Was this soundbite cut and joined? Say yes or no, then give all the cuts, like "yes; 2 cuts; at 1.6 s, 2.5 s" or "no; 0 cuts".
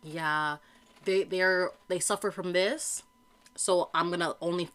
no; 0 cuts